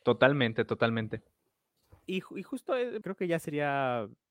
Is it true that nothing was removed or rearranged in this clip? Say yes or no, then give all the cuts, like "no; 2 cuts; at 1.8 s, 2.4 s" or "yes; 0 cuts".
no; 1 cut; at 3.0 s